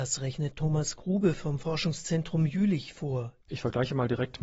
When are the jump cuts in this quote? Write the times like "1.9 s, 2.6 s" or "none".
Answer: 3.4 s